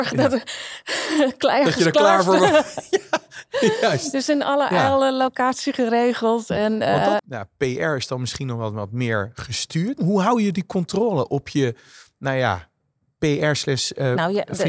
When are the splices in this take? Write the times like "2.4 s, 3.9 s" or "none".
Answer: 7.2 s, 10.0 s